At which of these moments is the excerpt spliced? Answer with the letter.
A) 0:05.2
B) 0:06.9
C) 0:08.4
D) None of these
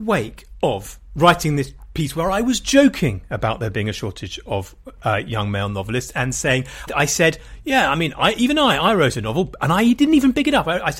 B